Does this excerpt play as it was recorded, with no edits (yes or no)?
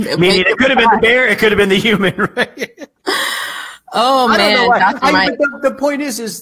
no